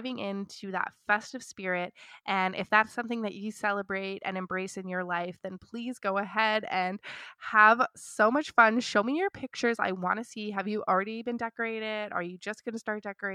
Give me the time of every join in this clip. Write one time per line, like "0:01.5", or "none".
none